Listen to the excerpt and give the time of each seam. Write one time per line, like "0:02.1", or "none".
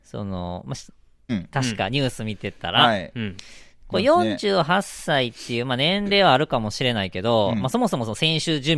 0:01.3

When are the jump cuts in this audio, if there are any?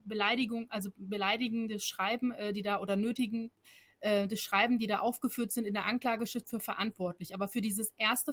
none

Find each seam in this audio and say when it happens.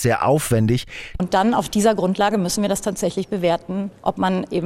0:01.2

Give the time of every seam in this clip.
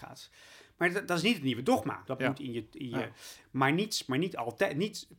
0:02.0
0:03.4

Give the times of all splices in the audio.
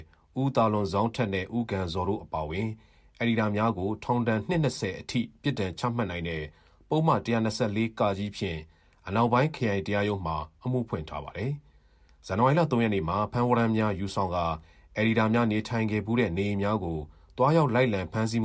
none

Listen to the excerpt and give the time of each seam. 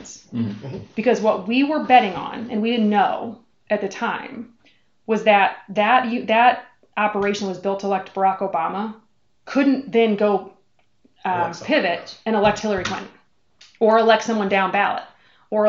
none

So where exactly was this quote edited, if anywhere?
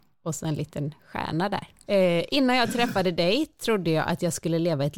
0:01.9

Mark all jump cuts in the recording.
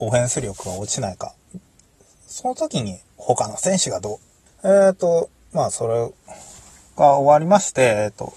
0:04.5

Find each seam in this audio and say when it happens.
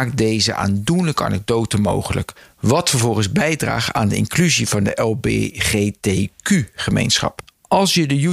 none

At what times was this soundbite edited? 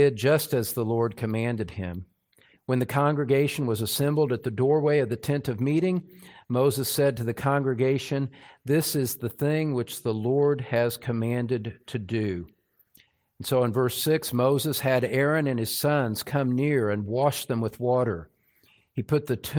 none

